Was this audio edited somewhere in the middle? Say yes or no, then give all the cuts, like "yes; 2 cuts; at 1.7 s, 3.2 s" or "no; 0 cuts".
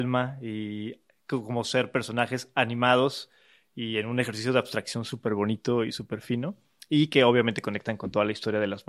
no; 0 cuts